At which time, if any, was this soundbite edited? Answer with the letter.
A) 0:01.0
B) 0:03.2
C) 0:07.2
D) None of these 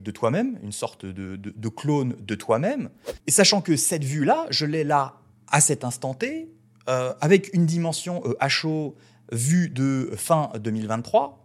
B